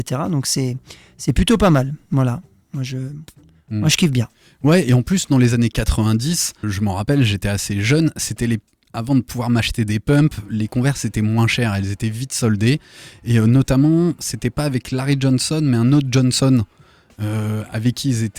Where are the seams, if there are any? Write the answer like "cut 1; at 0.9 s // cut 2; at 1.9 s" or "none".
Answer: cut 1; at 6.6 s